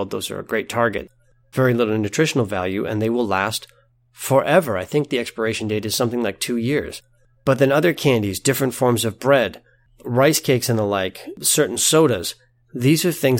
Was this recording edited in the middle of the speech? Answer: no; 0 cuts

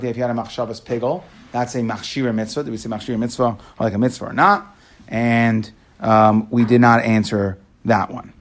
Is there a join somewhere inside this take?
no; 0 cuts

